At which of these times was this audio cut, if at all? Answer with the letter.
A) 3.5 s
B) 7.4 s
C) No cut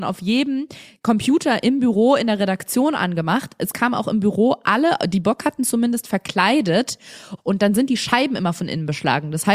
B